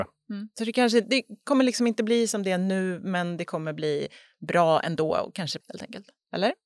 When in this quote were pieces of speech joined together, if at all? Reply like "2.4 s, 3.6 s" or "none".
5.6 s